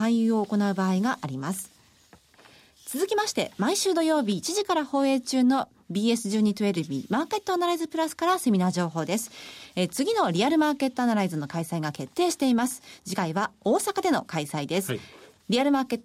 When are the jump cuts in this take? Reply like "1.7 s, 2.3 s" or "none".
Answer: none